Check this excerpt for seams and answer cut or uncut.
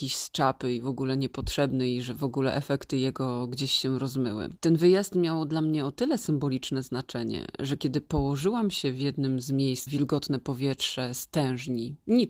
cut